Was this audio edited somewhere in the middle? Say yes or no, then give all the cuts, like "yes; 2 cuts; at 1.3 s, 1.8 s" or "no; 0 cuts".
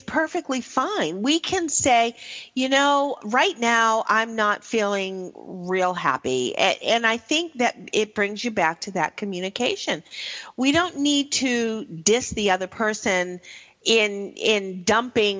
no; 0 cuts